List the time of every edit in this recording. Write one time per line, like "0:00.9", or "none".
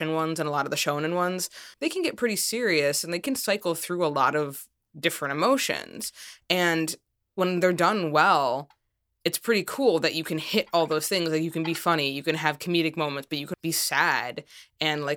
0:01.7
0:13.5